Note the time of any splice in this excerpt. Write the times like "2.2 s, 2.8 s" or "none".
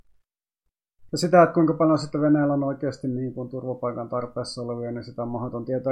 1.1 s